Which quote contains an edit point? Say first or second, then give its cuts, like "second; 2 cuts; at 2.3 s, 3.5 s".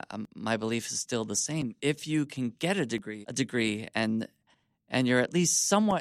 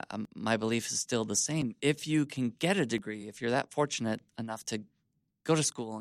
first; 1 cut; at 3.2 s